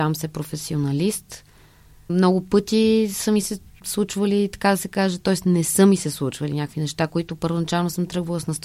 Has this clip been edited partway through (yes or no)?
no